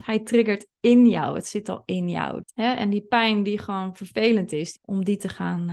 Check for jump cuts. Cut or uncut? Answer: cut